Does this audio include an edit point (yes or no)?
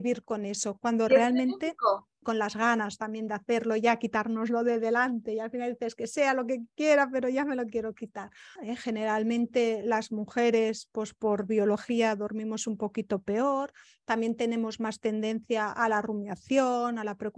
yes